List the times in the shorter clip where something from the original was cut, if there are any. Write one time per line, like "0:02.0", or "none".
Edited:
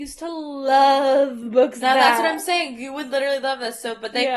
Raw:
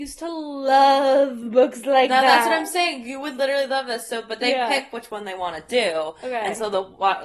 0:01.8